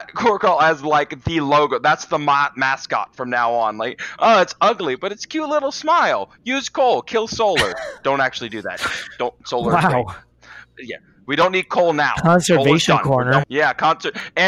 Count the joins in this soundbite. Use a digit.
1